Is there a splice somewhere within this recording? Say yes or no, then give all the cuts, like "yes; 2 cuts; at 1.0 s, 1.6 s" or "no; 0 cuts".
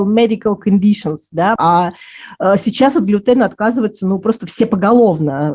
yes; 1 cut; at 1.6 s